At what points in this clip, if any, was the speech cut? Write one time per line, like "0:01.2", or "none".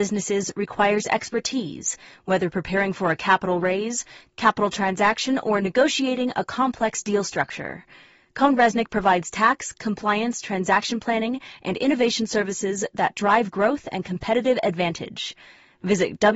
none

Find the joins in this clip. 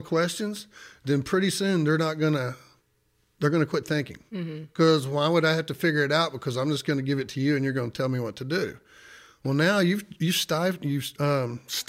none

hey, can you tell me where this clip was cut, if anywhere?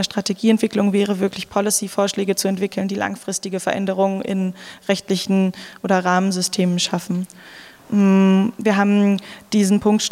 0:07.8

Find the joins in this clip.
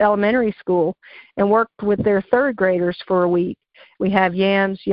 0:04.0

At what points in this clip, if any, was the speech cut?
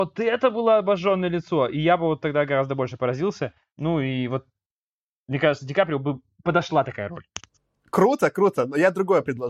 none

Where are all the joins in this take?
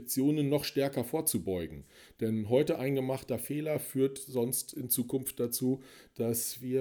none

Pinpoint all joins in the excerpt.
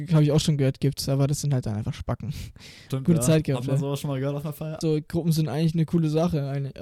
0:02.9
0:04.8

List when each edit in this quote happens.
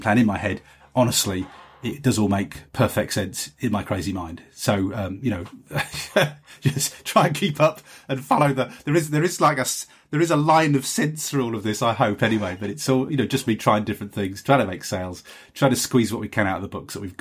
none

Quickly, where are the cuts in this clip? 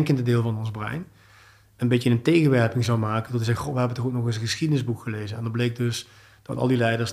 none

